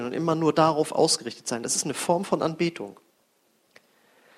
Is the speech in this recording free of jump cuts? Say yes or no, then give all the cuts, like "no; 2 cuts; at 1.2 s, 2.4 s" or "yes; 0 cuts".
yes; 0 cuts